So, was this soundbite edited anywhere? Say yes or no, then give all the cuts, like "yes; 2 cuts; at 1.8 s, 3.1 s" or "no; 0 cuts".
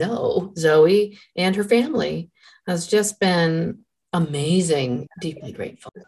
yes; 1 cut; at 5.1 s